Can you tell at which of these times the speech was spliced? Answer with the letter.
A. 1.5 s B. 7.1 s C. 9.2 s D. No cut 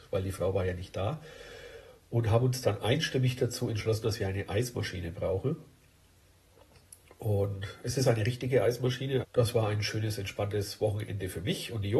C